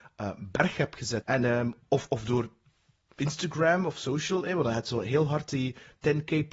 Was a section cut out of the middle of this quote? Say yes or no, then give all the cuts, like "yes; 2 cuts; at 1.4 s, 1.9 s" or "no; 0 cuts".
yes; 1 cut; at 1.2 s